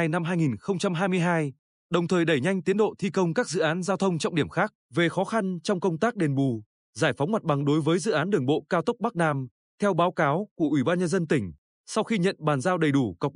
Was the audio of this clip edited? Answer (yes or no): yes